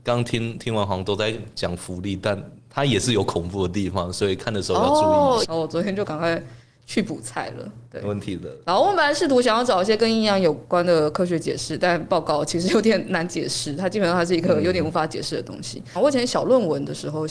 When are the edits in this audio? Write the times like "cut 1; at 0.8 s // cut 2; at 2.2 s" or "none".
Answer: cut 1; at 5.4 s // cut 2; at 16.0 s